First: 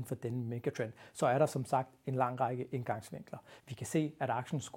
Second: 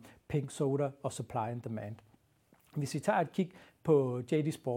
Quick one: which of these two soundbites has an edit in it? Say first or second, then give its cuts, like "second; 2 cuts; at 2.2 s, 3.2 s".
first; 1 cut; at 3.6 s